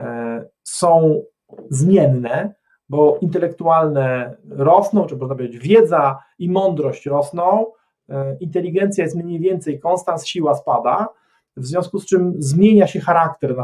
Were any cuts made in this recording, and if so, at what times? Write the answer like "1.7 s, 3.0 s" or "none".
none